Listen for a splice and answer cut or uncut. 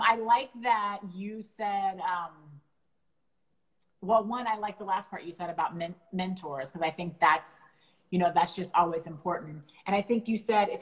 uncut